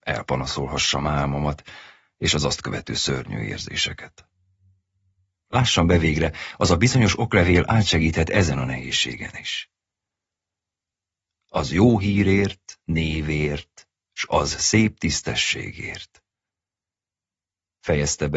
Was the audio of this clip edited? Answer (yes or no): yes